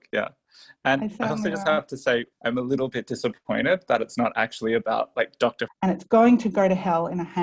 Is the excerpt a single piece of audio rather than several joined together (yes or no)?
no